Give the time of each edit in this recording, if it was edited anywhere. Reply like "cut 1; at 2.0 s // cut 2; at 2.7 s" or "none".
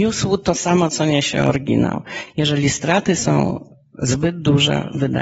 none